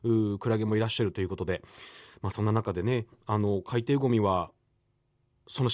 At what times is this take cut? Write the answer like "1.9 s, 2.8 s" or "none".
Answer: none